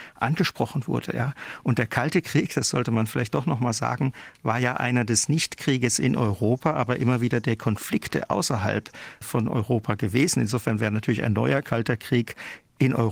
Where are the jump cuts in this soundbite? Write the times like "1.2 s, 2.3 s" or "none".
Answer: none